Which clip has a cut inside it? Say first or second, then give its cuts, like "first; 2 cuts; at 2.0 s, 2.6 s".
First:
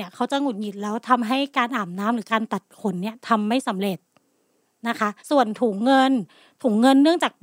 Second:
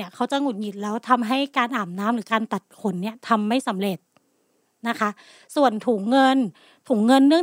first; 1 cut; at 5.2 s